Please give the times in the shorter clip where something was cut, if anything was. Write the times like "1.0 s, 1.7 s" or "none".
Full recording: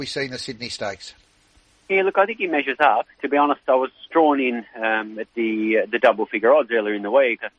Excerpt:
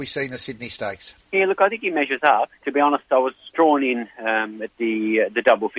1.2 s